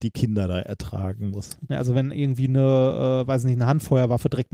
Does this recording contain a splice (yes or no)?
yes